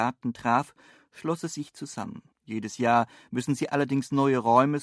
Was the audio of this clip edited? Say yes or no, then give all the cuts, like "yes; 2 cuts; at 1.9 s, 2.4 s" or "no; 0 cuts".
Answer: yes; 1 cut; at 2.3 s